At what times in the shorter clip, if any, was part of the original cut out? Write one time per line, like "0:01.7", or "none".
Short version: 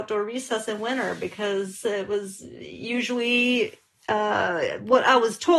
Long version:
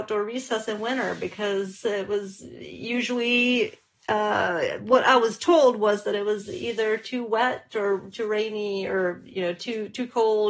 none